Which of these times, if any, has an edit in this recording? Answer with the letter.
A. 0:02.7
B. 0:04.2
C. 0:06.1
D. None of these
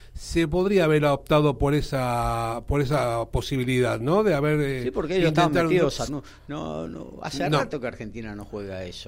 C